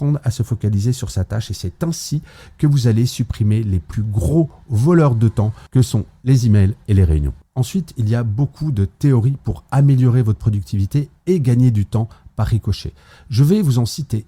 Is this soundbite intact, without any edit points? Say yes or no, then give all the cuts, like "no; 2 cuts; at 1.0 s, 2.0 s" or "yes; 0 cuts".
yes; 0 cuts